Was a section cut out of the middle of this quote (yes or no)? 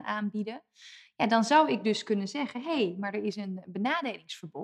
no